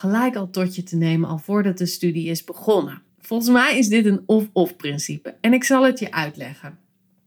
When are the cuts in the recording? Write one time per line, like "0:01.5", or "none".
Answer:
0:03.1